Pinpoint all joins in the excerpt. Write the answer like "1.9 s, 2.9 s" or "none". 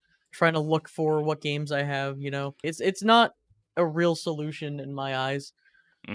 2.6 s